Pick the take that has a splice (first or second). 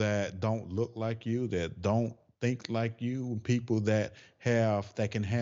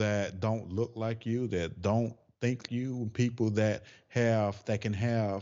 second